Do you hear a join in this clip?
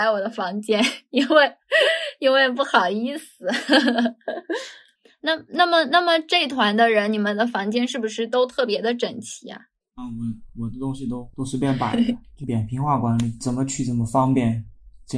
no; 0 cuts

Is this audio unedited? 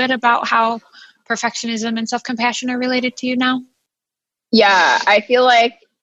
yes; 0 cuts

